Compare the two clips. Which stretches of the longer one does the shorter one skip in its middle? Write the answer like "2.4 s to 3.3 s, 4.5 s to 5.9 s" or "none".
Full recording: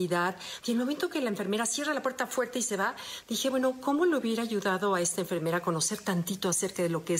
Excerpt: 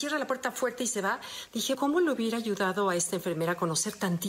3.5 s to 3.8 s